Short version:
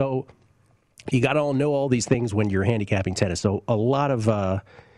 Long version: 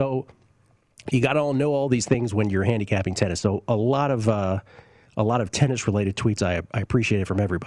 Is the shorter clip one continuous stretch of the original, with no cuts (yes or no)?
yes